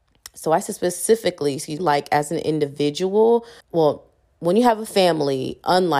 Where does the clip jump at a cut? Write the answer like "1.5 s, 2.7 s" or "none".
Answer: 1.8 s, 3.6 s